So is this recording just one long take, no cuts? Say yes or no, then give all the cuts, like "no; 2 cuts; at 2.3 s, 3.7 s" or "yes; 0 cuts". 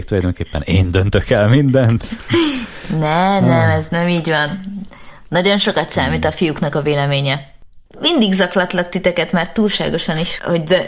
no; 1 cut; at 7.9 s